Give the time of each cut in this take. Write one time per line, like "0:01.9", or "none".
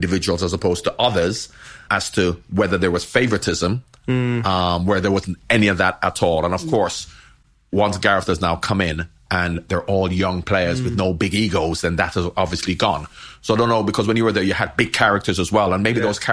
0:01.9